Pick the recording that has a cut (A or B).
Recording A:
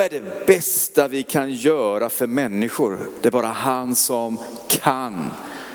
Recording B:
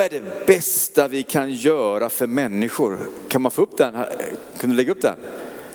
A